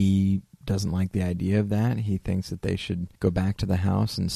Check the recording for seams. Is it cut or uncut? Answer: cut